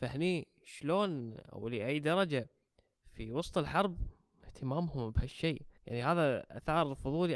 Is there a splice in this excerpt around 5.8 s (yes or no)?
yes